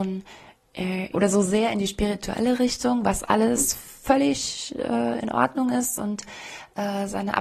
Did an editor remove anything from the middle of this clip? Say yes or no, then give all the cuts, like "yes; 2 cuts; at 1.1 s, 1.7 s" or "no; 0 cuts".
yes; 1 cut; at 1.1 s